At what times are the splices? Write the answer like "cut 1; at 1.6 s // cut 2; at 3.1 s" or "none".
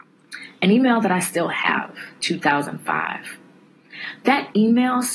cut 1; at 2.2 s